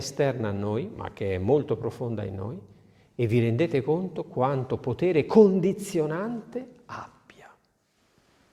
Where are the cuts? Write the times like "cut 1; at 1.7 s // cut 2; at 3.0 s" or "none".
none